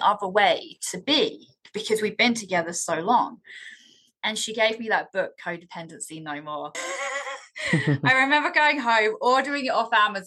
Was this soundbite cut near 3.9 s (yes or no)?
no